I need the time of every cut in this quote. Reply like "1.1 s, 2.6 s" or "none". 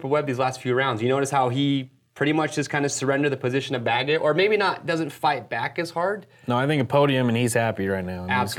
none